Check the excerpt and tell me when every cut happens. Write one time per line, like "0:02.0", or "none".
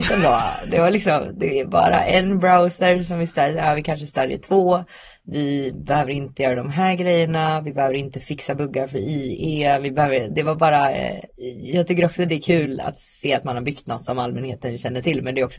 0:11.3